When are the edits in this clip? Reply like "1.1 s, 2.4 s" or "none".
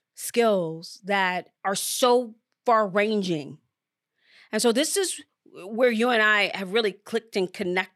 1.5 s